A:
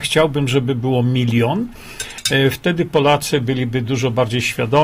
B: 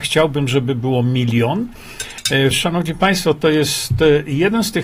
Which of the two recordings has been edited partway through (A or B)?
B